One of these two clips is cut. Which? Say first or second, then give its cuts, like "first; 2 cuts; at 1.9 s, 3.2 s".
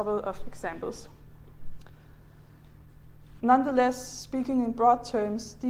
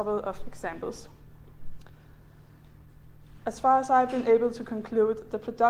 first; 1 cut; at 3.4 s